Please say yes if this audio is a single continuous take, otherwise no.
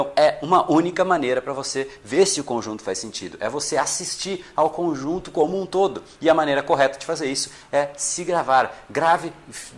yes